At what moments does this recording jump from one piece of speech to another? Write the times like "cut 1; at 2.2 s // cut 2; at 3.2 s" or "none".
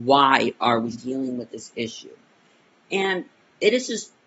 cut 1; at 0.9 s